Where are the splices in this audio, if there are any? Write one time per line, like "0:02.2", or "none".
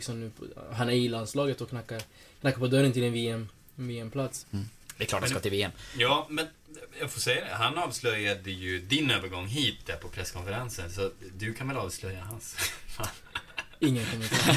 0:04.4